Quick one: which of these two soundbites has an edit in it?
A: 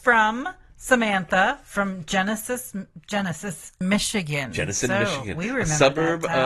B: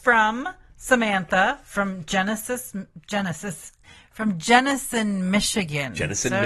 A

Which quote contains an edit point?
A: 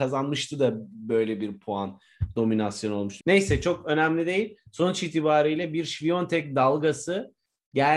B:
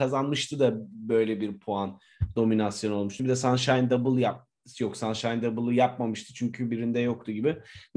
A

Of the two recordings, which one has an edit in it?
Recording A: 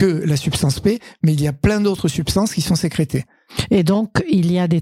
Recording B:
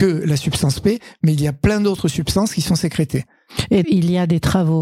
B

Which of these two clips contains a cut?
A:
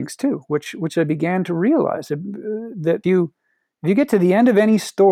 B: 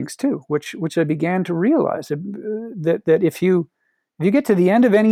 A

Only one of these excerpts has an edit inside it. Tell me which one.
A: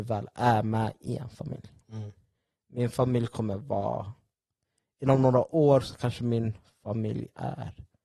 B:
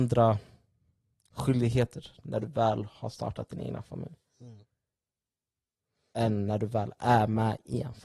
A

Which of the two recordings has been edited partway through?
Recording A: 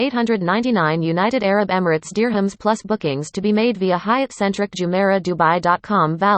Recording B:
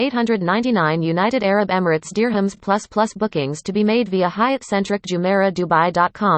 A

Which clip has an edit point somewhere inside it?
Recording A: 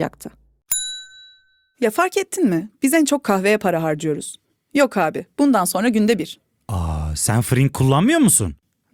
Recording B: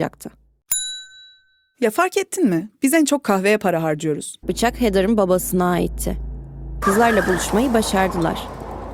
B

